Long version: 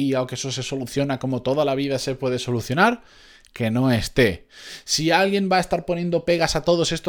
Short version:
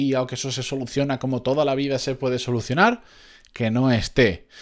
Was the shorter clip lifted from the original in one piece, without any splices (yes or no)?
yes